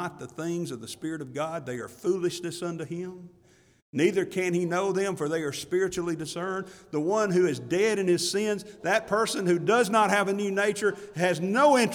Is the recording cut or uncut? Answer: uncut